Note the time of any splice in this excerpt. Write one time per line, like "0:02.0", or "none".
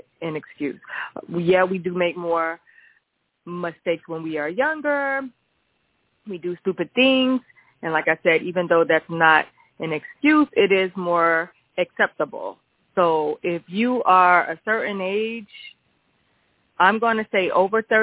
none